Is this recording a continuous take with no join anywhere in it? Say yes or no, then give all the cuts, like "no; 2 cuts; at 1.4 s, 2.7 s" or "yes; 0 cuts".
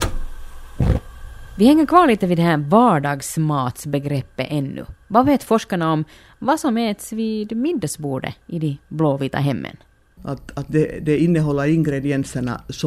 no; 1 cut; at 10.2 s